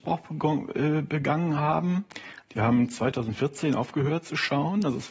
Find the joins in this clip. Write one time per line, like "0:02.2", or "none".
0:02.5